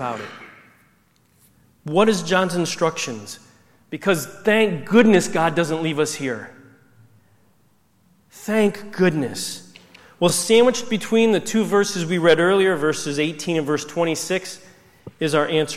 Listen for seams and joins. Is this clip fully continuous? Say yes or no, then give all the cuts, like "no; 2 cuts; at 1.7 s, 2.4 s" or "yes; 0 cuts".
yes; 0 cuts